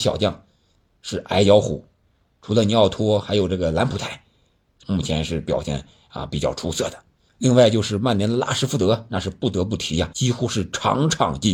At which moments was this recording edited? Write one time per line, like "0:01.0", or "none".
0:04.8
0:07.3
0:10.1